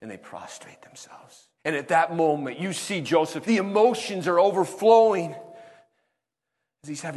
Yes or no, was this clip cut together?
yes